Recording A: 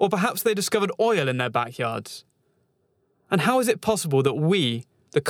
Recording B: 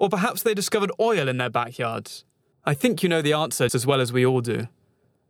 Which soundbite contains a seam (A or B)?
B